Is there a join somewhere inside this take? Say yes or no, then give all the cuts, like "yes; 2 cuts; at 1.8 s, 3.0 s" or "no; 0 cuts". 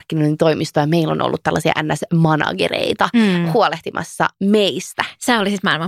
no; 0 cuts